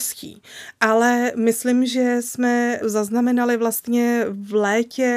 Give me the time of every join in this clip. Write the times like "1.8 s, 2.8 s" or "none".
2.8 s